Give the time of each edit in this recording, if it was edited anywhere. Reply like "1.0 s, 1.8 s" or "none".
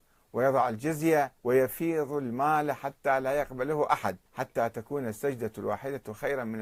1.4 s, 4.3 s